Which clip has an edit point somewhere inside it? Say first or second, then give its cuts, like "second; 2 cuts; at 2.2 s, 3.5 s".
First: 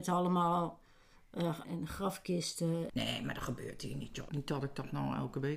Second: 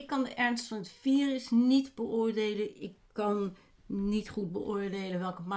first; 3 cuts; at 1.6 s, 2.9 s, 4.3 s